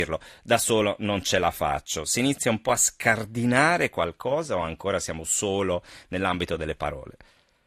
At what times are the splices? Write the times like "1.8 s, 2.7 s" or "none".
none